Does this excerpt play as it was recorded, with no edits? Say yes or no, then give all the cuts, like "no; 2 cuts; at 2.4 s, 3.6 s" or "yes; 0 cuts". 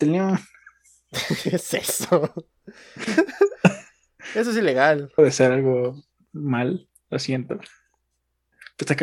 no; 1 cut; at 5.2 s